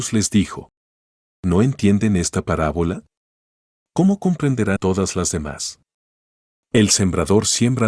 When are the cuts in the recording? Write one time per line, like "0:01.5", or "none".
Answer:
0:04.8